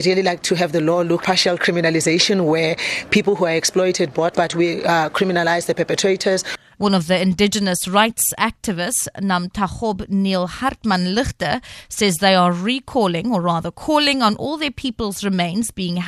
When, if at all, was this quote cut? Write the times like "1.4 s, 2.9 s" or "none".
1.2 s, 4.3 s, 6.7 s